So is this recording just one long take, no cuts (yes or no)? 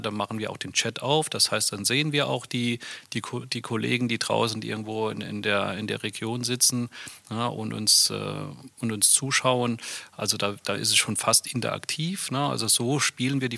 yes